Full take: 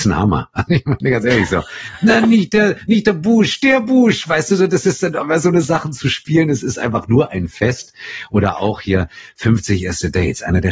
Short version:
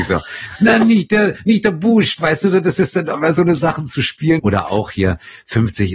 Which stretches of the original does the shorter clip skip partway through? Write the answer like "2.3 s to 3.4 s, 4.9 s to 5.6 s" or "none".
3.6 s to 4.2 s, 6.5 s to 8.3 s